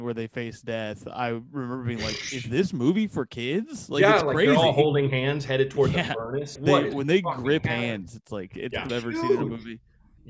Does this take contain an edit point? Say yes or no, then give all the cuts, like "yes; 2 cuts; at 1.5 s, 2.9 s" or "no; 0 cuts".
yes; 2 cuts; at 6.6 s, 8.9 s